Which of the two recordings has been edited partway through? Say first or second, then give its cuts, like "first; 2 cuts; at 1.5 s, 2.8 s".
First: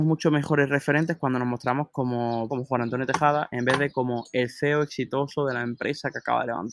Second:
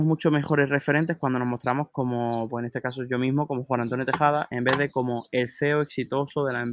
first; 1 cut; at 2.5 s